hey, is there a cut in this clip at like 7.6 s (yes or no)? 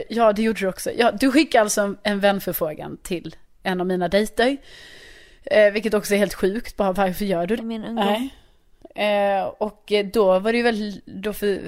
yes